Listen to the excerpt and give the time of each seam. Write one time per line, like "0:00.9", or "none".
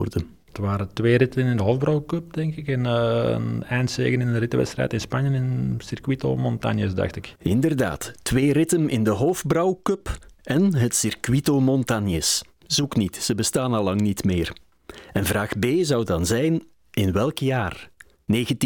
none